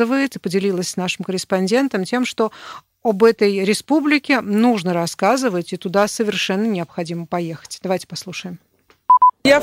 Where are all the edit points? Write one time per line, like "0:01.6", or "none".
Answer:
none